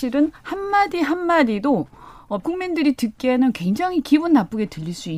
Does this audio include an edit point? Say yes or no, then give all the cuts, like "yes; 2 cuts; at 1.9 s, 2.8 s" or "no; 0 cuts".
yes; 1 cut; at 2.4 s